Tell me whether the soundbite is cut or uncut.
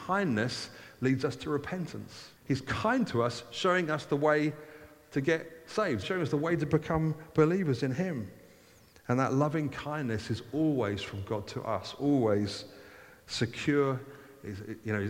cut